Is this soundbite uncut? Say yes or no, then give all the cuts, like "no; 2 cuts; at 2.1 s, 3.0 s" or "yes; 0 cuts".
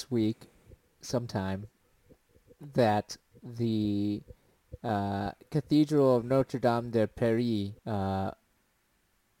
no; 1 cut; at 7.8 s